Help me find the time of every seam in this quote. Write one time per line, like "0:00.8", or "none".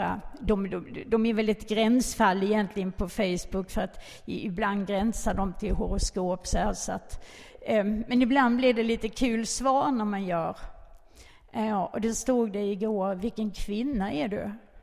none